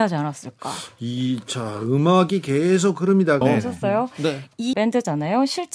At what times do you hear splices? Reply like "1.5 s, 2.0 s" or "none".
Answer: 3.4 s, 4.7 s